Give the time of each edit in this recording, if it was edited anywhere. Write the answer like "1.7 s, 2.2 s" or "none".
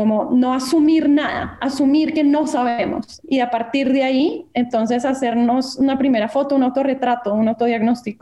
none